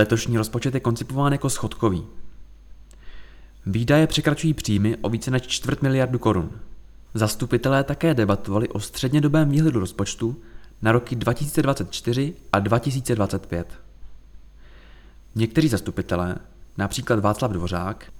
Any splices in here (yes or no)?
yes